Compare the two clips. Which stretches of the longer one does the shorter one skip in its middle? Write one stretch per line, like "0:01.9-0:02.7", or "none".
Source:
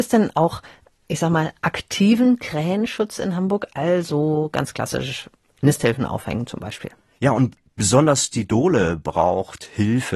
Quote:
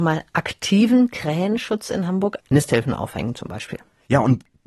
0:03.7-0:05.5